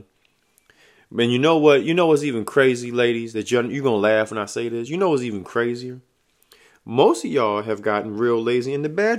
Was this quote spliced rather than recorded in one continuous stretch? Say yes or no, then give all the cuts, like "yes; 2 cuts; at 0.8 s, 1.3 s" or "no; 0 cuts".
no; 0 cuts